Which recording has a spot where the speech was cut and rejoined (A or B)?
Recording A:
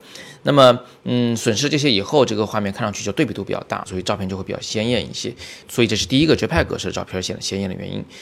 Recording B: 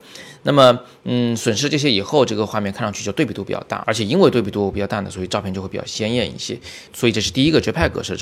A